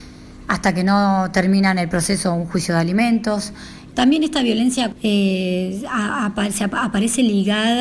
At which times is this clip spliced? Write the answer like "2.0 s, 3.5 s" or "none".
3.9 s, 4.9 s